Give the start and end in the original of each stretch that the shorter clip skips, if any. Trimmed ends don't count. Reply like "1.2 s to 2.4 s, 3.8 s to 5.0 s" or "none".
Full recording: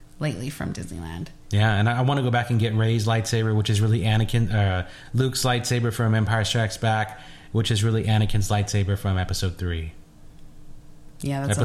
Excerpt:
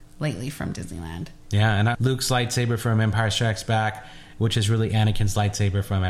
1.9 s to 5.1 s